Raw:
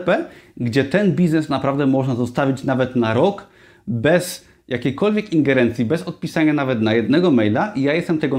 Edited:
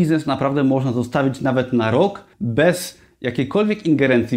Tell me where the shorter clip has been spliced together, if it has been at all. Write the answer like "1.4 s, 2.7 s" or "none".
2.3 s